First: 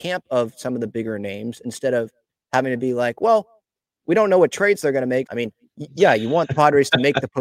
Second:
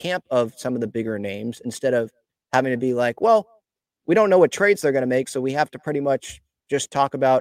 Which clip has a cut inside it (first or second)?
first